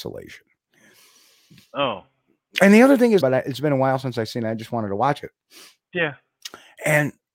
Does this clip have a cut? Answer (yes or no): yes